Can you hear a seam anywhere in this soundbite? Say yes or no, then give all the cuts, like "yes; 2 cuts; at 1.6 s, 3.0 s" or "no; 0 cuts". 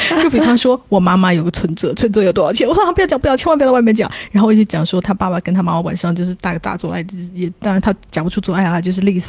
no; 0 cuts